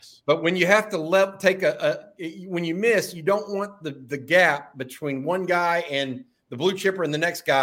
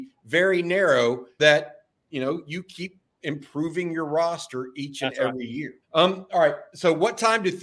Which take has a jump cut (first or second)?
second